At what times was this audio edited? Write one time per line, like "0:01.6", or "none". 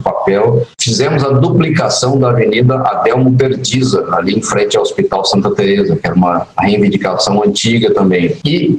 none